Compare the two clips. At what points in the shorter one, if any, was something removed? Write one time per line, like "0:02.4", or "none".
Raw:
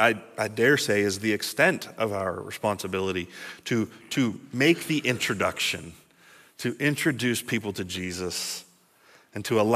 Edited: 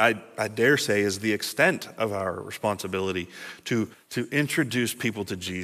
0:03.9